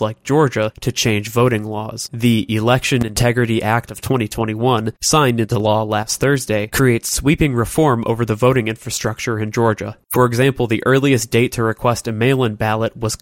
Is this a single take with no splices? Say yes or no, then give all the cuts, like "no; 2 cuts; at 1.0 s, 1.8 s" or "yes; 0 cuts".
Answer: yes; 0 cuts